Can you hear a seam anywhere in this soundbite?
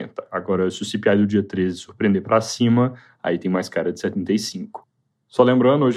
no; 0 cuts

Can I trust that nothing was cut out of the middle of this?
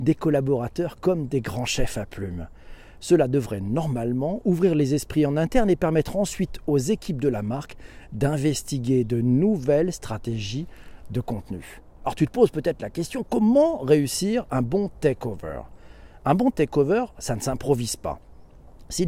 no; 1 cut; at 17.1 s

